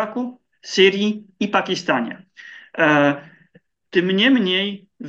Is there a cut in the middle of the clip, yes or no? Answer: yes